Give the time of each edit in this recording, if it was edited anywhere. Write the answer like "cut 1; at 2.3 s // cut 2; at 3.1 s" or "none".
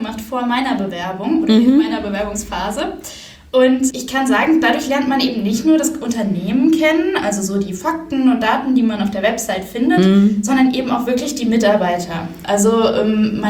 cut 1; at 3.9 s